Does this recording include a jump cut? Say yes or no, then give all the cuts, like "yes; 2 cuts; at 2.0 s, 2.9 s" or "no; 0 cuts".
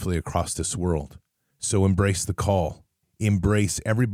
yes; 2 cuts; at 1.5 s, 3.0 s